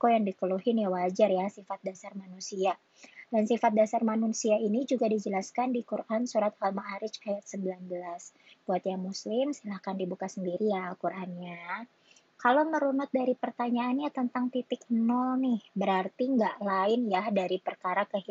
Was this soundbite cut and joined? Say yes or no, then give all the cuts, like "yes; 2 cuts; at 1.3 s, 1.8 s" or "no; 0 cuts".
no; 0 cuts